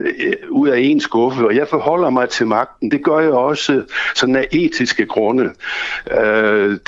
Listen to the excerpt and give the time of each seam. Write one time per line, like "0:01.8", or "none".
none